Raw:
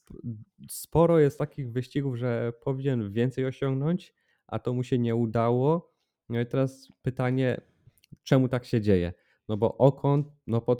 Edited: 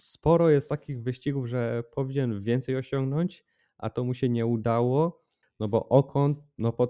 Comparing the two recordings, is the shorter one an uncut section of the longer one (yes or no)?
no